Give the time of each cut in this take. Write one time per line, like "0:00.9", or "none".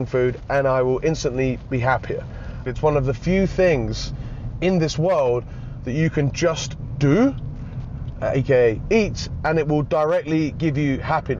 0:02.7
0:08.2